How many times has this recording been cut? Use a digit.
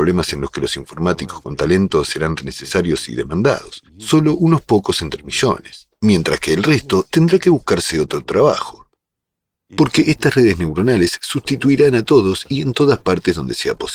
2